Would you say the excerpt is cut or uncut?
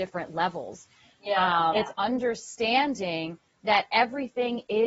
cut